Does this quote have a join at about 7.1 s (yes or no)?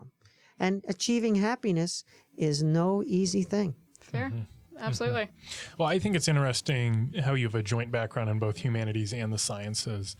yes